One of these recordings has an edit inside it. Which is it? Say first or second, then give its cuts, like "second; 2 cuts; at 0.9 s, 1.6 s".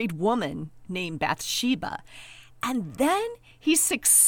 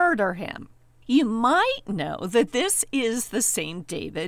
second; 1 cut; at 1.0 s